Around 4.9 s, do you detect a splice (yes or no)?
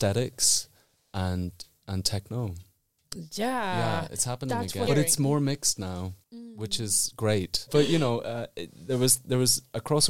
yes